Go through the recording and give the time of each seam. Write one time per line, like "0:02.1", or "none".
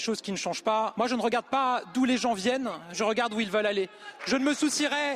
0:00.9
0:04.2